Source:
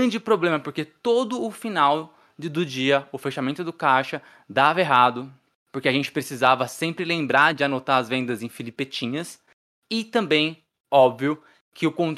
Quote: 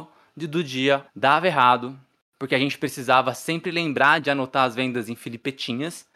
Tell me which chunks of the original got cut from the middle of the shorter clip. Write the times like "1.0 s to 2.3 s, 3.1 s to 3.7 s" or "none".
3.1 s to 4.4 s